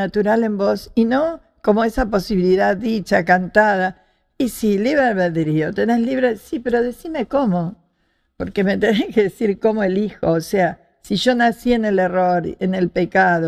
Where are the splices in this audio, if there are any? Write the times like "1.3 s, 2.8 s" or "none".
none